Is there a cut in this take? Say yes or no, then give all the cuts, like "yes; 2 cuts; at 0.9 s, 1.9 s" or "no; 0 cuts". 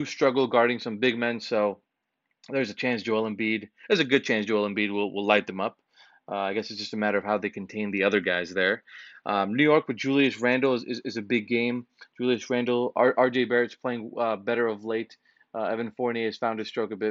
no; 0 cuts